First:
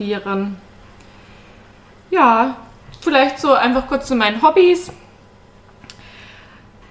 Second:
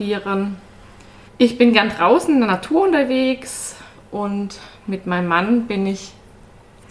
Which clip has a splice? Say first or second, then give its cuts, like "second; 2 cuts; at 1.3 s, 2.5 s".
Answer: second; 1 cut; at 1.3 s